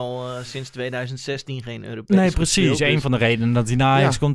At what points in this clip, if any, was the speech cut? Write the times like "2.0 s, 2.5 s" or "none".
none

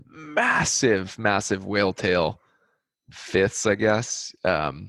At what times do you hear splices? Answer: none

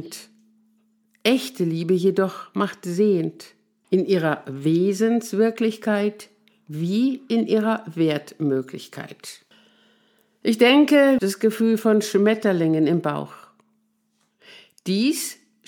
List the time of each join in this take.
3.8 s, 11.2 s

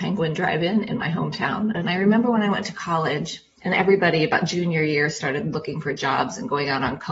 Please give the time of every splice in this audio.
1.7 s

